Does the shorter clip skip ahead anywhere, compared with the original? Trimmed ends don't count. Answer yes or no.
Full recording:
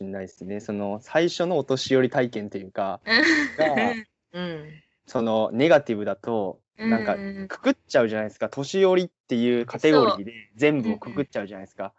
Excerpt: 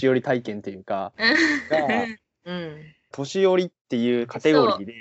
yes